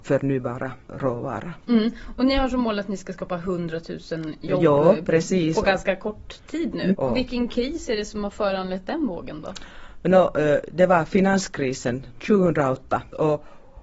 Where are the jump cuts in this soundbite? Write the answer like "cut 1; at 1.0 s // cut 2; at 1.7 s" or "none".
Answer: cut 1; at 7.0 s